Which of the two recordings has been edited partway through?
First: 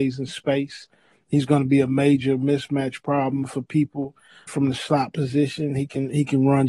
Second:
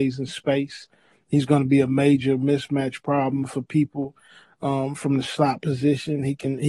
first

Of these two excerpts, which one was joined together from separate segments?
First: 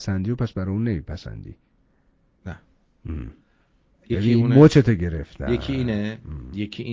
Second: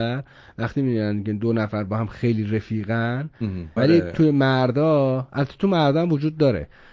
second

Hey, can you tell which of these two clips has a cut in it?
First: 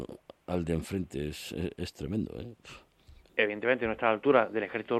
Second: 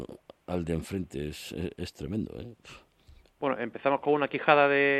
first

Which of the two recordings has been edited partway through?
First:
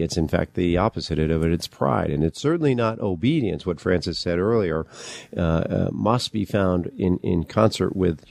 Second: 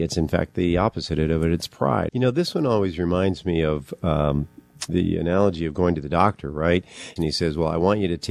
second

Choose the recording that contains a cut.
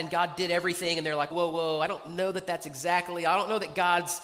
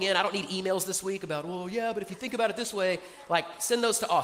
first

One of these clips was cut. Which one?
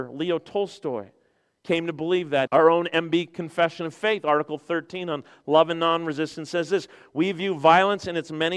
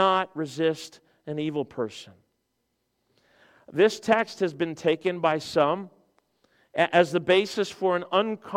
first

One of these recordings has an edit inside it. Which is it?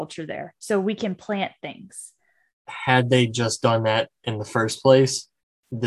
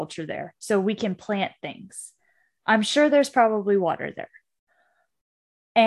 first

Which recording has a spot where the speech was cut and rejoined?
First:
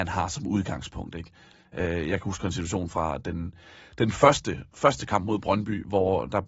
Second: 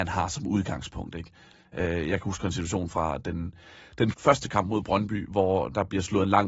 second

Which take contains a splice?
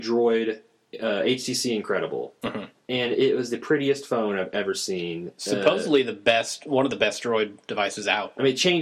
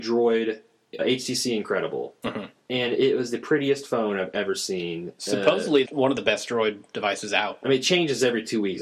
second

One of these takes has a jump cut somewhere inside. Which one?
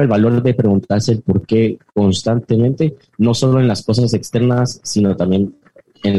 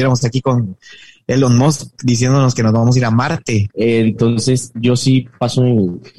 second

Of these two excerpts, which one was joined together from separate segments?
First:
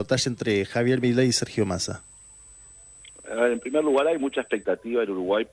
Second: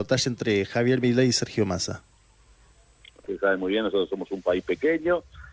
second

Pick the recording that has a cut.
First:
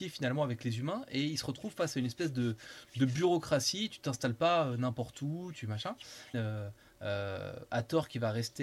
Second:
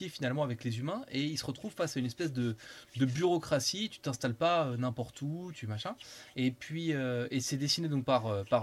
first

